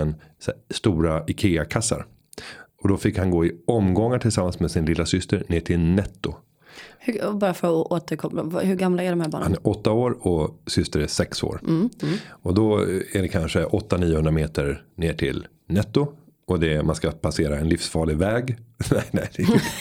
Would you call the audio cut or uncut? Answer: uncut